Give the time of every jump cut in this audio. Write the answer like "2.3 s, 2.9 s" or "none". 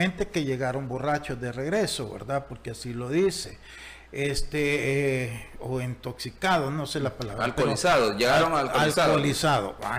none